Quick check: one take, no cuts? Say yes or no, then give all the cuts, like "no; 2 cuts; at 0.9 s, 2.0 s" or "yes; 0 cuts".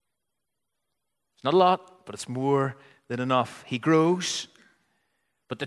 yes; 0 cuts